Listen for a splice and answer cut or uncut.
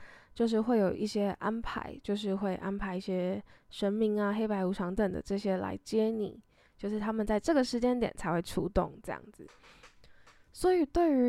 cut